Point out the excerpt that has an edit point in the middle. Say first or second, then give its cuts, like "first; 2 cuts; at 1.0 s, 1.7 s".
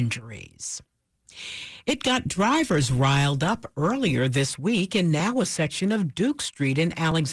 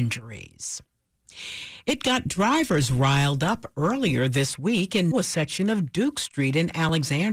second; 1 cut; at 5.1 s